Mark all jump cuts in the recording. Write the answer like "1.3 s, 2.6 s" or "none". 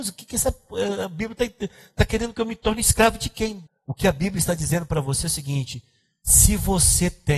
3.7 s

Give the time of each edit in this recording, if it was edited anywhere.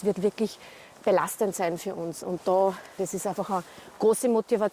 3.0 s

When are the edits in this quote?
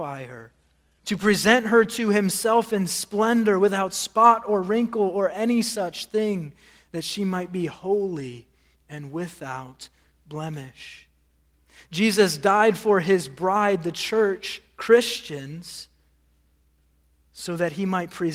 1.0 s

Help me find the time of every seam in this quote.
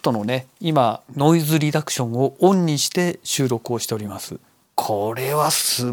1.1 s, 4.6 s

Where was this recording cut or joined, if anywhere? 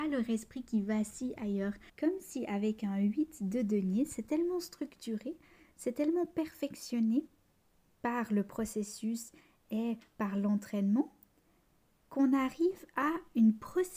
1.9 s

